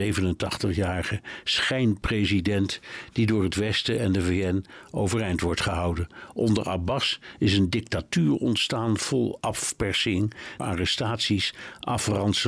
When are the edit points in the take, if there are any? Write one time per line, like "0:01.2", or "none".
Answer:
0:10.6